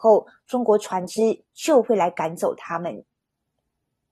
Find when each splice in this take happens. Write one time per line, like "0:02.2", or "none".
none